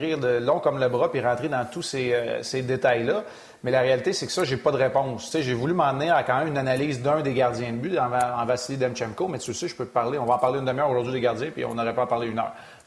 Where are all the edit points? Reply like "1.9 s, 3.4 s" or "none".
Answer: none

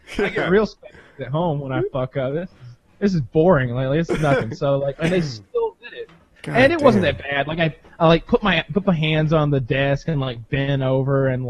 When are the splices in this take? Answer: 5.0 s, 6.4 s

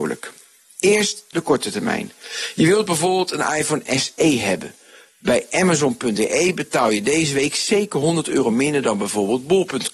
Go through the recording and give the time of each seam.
none

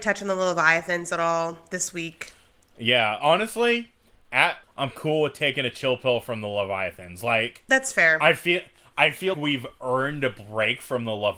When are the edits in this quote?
4.6 s, 9.3 s

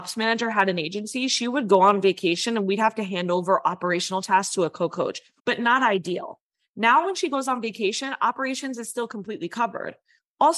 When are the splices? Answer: 5.4 s

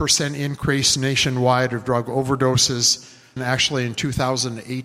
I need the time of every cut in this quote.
3.4 s

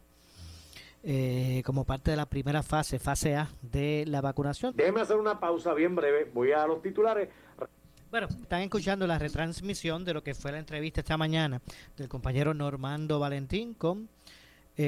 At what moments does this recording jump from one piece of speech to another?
4.7 s, 8.4 s

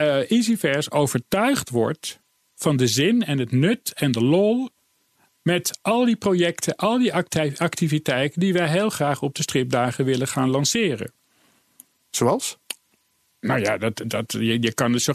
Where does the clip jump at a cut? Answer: none

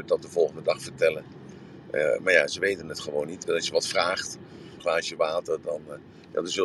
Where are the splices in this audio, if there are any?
3.4 s, 4.8 s

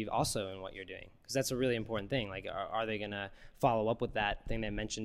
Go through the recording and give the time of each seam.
none

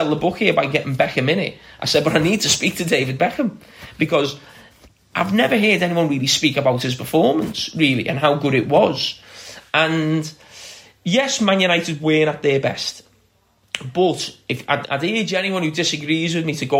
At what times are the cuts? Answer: 14.8 s

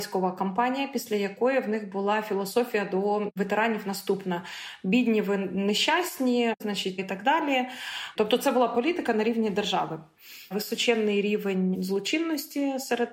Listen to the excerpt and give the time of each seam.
6.6 s, 10.5 s

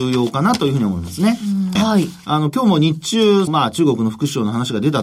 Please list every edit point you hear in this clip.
1.8 s, 3.5 s

